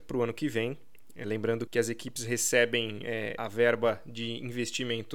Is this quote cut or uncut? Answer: cut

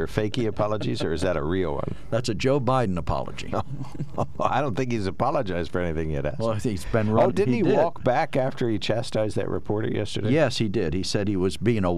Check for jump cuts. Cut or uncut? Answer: cut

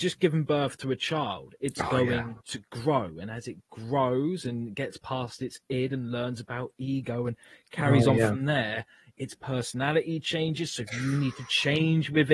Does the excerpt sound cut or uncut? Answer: uncut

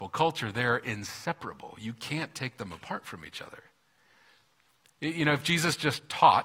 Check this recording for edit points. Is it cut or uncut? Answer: uncut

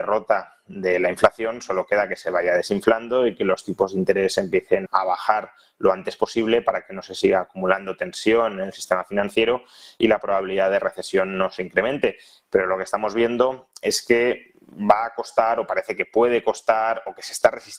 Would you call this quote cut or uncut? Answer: cut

